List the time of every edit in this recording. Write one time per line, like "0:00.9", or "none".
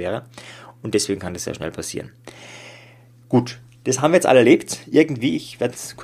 none